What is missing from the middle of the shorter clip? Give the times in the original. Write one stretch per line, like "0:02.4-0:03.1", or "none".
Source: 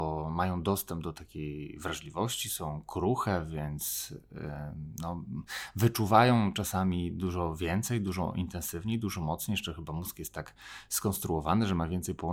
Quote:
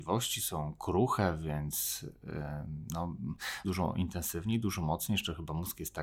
0:05.7-0:08.0